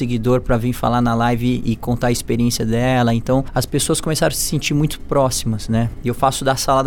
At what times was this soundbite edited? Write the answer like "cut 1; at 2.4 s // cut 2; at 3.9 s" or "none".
none